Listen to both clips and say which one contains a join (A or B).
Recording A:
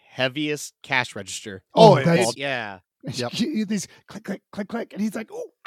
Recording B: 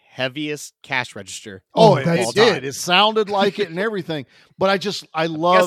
A